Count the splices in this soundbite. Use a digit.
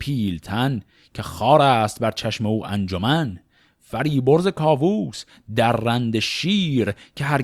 0